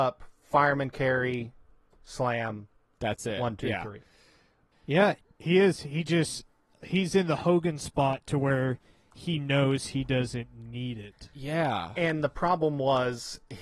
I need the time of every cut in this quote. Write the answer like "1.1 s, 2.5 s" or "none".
4.7 s